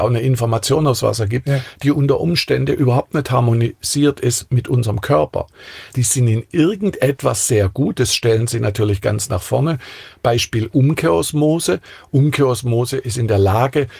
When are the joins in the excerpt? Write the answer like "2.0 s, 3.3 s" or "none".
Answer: 5.9 s